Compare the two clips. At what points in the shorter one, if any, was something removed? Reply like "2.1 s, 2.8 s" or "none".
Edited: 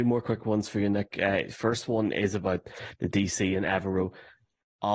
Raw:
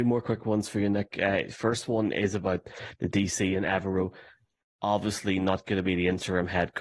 none